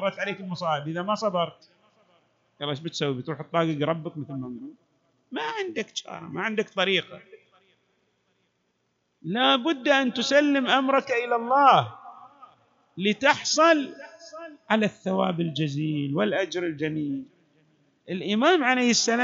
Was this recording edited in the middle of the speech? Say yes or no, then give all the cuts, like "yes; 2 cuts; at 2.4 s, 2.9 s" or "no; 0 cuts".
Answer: no; 0 cuts